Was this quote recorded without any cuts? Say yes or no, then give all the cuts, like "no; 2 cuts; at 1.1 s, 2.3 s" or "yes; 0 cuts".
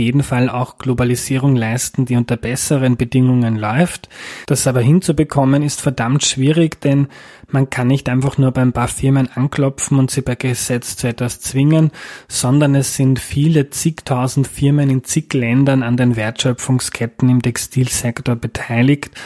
yes; 0 cuts